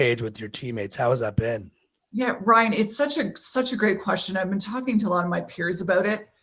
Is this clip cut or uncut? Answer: uncut